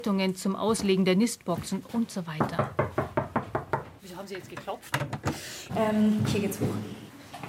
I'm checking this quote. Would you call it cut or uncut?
cut